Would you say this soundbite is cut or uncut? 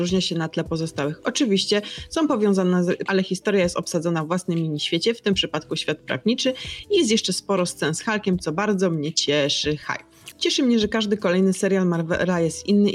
cut